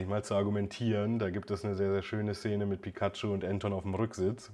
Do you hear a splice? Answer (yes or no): no